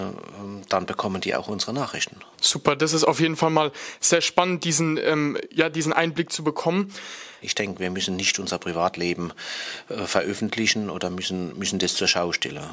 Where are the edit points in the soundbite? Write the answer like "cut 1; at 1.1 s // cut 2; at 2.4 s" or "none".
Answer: cut 1; at 2.3 s // cut 2; at 7.4 s